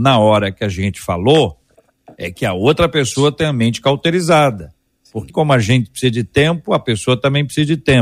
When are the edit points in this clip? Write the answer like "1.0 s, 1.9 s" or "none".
5.3 s